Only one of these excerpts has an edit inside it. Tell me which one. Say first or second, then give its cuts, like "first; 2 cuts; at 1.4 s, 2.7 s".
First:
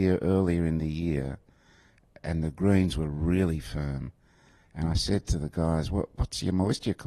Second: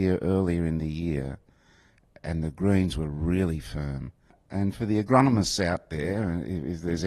second; 1 cut; at 4.3 s